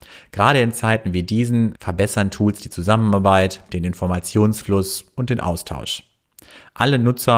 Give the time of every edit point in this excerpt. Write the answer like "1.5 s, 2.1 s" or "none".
1.8 s, 3.7 s